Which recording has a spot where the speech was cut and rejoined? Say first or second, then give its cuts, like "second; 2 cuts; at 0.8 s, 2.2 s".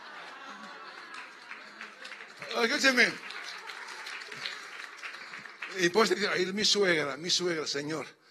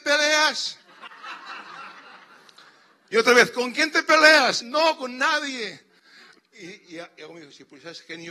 second; 2 cuts; at 4.6 s, 6.4 s